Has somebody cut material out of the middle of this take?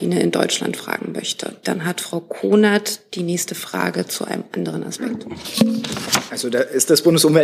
yes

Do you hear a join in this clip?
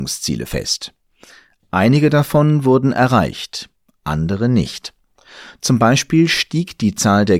no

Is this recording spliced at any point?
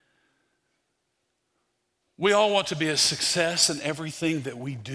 yes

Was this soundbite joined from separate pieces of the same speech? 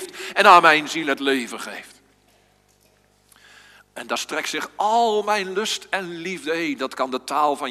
no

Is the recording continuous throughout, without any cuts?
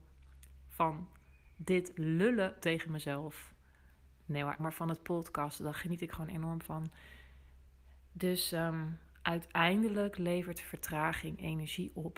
no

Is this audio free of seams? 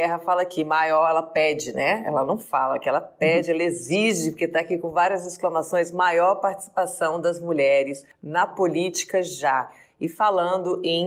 yes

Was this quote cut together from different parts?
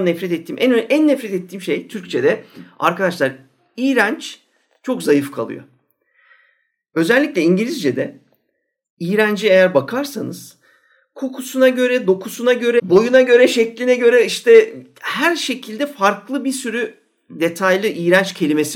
yes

